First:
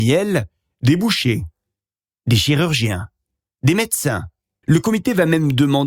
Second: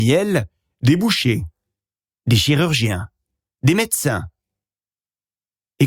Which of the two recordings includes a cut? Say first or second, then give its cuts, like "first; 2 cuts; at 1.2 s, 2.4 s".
first; 1 cut; at 4.6 s